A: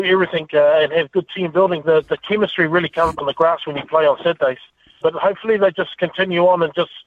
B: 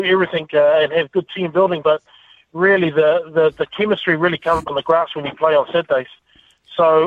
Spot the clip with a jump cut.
A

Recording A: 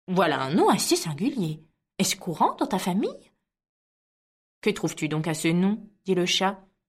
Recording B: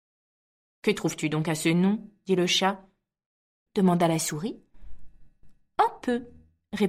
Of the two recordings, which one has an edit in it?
B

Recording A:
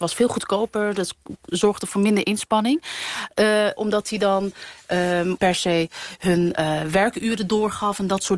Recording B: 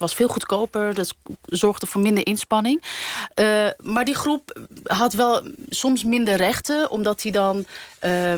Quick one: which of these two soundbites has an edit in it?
A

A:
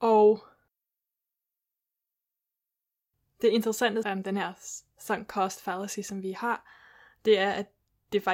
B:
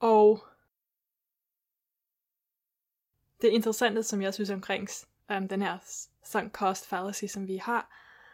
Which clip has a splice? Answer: A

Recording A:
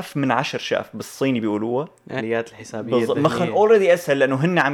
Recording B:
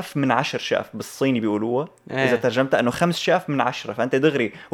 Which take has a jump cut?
A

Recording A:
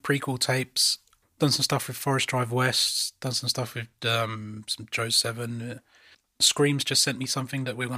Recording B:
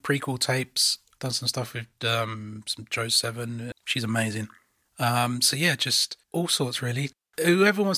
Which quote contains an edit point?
B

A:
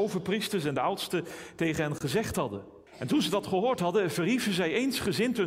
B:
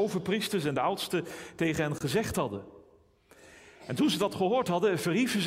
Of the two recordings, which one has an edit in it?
A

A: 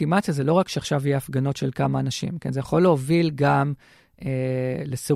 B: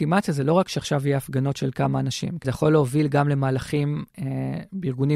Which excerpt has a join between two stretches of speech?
B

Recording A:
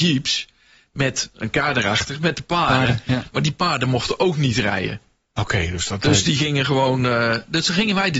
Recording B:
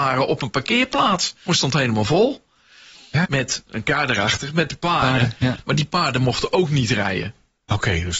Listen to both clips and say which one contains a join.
B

